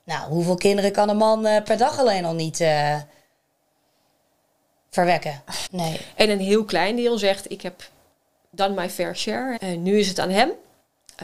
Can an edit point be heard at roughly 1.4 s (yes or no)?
no